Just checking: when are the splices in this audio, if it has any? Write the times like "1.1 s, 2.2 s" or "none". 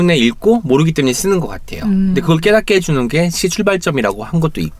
none